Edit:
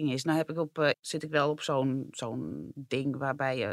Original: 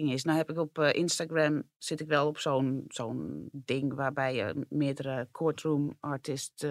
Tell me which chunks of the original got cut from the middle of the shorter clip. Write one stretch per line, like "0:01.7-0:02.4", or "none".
0:00.9-0:01.7